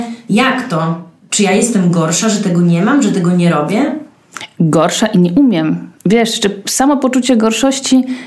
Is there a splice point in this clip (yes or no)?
no